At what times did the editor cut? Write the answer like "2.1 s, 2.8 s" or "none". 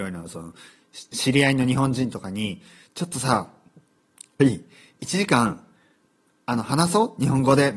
4.4 s